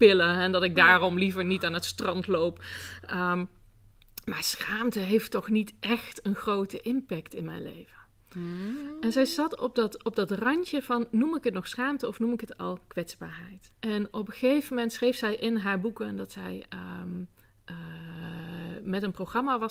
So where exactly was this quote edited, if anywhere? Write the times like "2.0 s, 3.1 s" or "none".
13.7 s